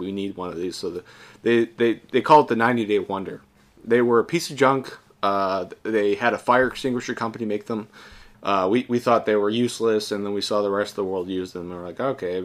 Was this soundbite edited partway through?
yes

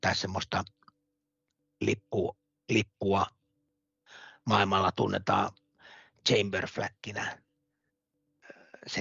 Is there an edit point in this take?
no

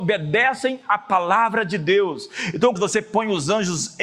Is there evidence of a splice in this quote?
yes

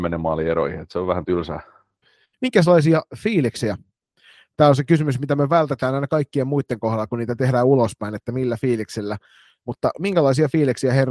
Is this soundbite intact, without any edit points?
no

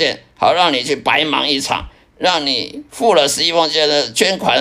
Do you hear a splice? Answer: no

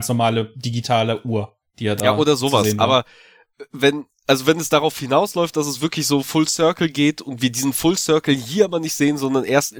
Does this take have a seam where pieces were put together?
no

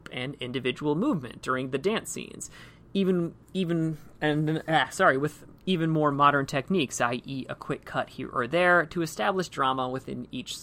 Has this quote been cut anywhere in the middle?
no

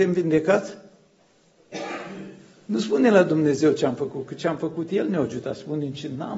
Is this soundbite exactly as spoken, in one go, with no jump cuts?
yes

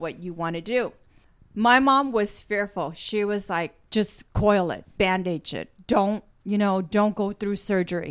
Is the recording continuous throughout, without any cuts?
no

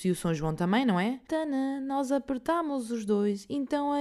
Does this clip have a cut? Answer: no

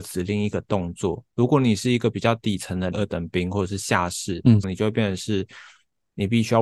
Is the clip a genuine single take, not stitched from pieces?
no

